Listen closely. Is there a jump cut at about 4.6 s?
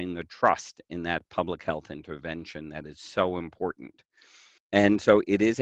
yes; 1 cut; at 4.6 s

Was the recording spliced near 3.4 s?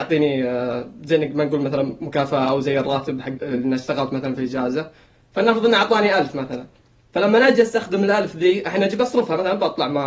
yes; 1 cut; at 3.4 s

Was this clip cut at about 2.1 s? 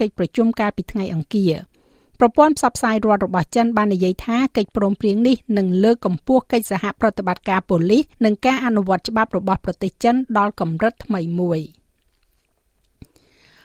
no; 1 cut; at 8.1 s

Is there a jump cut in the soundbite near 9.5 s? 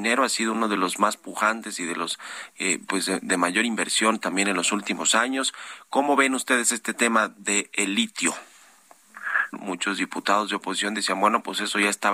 yes; 1 cut; at 9.5 s

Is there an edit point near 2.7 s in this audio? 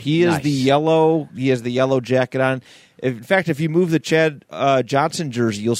no; 0 cuts

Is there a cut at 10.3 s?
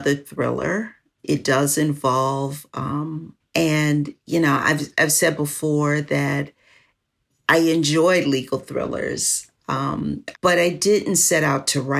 yes; 2 cuts; at 3.4 s, 10.3 s

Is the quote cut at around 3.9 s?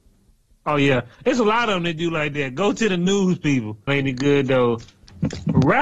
yes; 1 cut; at 3.9 s

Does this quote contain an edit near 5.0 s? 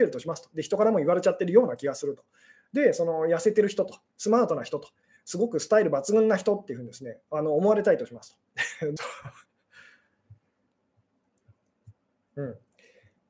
no; 1 cut; at 9.0 s

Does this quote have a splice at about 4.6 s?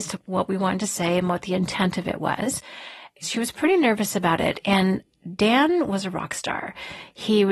no; 0 cuts

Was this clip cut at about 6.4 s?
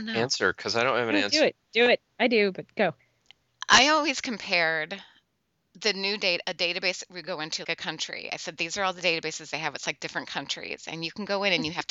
yes; 3 cuts; at 2.1 s, 6.4 s, 7.6 s

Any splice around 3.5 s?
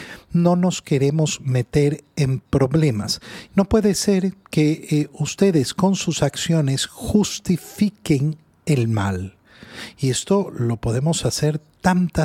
yes; 1 cut; at 3.5 s

